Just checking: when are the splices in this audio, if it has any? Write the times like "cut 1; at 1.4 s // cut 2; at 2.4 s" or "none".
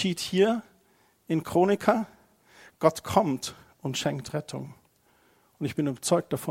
none